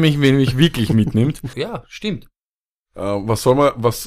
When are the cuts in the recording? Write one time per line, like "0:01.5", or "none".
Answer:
0:01.5